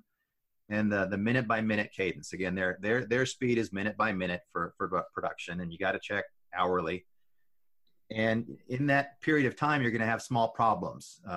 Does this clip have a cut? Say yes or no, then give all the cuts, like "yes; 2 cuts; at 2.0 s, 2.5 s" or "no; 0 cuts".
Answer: no; 0 cuts